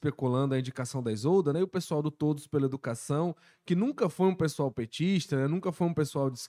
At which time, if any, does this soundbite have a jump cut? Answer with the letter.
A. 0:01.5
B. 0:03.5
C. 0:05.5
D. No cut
D